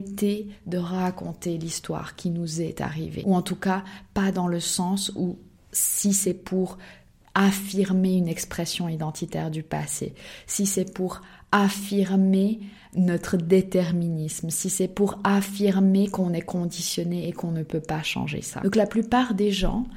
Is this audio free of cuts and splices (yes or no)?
yes